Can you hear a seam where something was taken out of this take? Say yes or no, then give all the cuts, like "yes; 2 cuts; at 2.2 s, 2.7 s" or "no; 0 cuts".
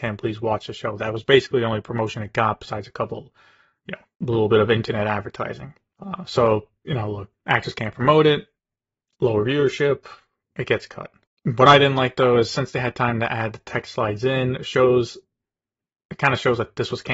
no; 0 cuts